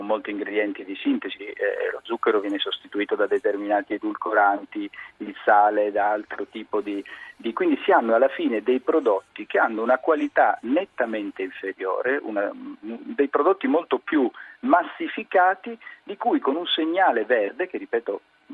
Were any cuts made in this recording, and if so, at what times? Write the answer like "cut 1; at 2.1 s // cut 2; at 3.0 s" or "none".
cut 1; at 1.4 s // cut 2; at 7.5 s